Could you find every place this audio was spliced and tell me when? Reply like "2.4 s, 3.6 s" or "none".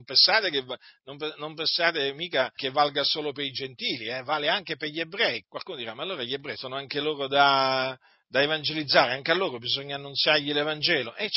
2.6 s, 5.4 s, 6.5 s